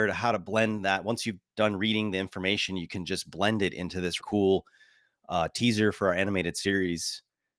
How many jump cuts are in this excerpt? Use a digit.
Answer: 1